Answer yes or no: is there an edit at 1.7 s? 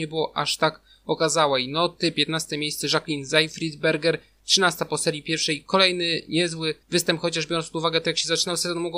no